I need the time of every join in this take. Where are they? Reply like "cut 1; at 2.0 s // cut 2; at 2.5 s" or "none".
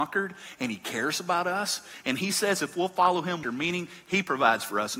cut 1; at 3.4 s